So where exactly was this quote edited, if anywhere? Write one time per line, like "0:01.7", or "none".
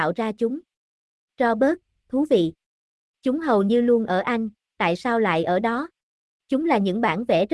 0:02.0
0:06.4